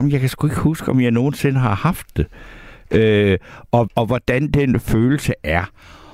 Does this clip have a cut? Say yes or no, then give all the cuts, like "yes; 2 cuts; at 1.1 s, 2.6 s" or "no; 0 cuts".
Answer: yes; 1 cut; at 3.9 s